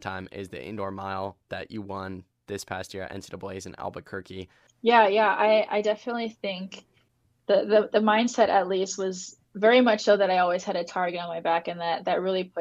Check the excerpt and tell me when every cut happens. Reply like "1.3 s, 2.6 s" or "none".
4.7 s, 9.4 s